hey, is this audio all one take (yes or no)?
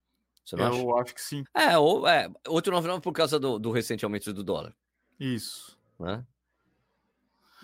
no